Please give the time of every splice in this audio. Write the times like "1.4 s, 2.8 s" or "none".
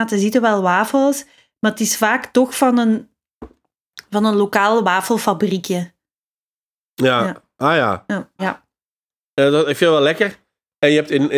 8.4 s